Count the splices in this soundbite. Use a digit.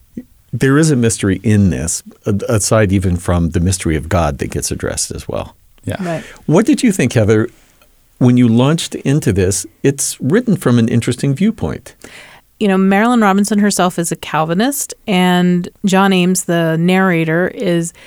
1